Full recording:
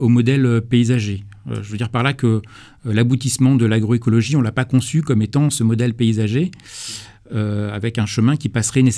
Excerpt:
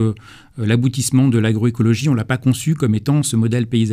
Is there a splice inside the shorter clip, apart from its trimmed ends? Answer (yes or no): no